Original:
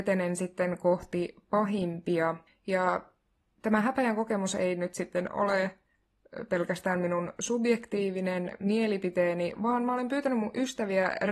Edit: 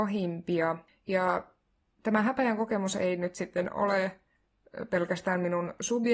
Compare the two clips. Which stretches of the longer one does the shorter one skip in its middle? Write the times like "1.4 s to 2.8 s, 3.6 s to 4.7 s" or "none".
none

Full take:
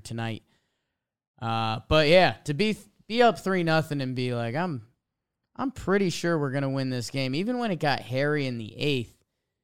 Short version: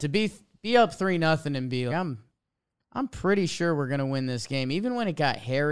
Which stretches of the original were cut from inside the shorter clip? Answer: 4.3 s to 4.5 s

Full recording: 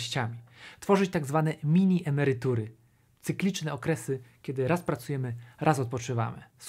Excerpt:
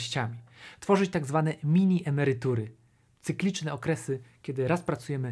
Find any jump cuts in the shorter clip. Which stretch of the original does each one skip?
none

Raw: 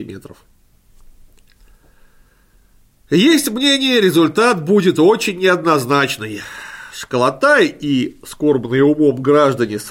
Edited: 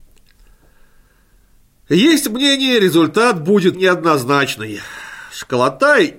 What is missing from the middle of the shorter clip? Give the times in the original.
4.9 s to 5.3 s

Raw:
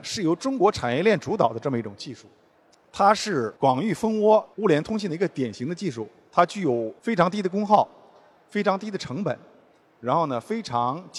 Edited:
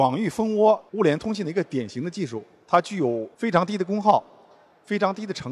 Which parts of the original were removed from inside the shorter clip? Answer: none

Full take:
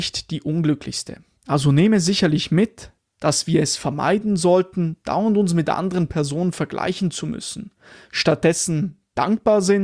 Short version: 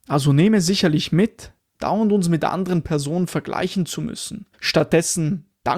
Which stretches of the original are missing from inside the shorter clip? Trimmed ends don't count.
3.1 s to 5.0 s, 7.8 s to 8.0 s

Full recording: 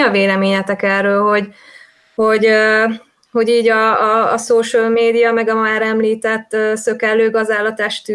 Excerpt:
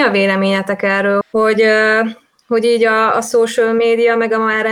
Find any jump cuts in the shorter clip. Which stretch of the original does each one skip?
1.2 s to 2.0 s, 4.0 s to 4.3 s

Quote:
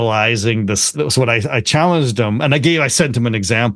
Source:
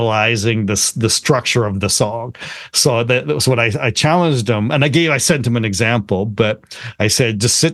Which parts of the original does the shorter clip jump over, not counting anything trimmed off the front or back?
0.9 s to 3.2 s

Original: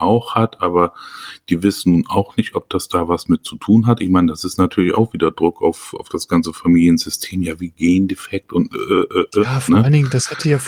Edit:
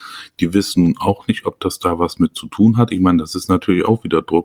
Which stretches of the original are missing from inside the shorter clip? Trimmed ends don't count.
none

